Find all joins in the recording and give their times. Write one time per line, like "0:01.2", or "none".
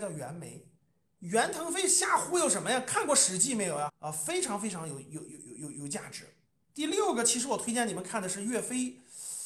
0:03.9